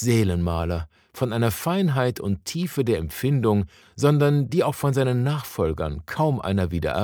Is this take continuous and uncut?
no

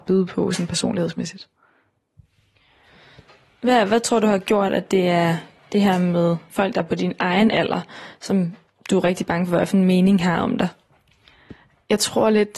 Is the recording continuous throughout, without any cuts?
yes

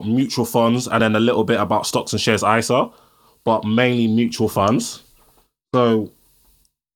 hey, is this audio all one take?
yes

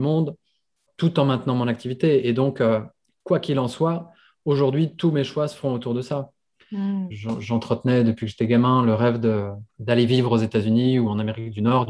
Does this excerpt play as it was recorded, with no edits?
no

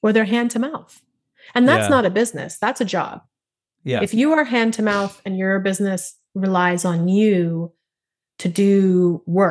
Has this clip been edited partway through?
no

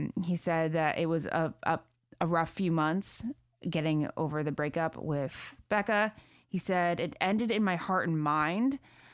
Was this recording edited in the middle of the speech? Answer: no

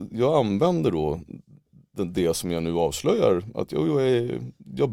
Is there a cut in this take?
no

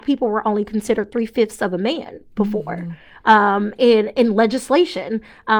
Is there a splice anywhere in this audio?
no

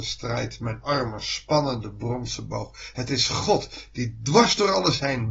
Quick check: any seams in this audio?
no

